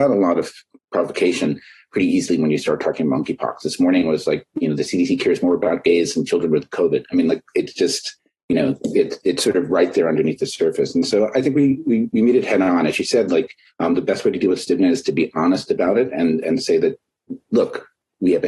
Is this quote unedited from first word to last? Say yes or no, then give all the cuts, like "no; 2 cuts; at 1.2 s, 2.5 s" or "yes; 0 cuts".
yes; 0 cuts